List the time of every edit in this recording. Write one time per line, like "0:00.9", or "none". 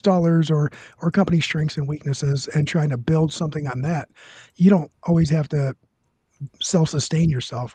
none